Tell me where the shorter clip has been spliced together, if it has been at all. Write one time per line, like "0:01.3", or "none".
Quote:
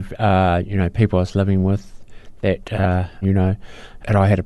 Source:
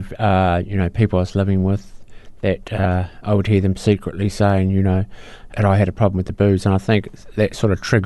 0:03.2